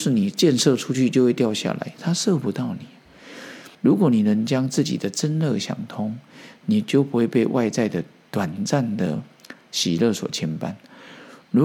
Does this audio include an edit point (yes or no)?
yes